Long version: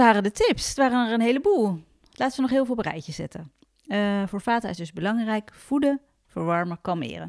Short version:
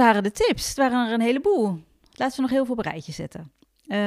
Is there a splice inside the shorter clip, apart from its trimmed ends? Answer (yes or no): no